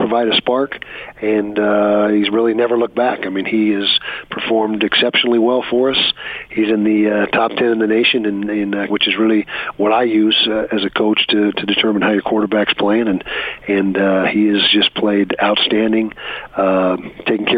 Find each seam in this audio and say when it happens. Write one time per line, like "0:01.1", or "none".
0:08.9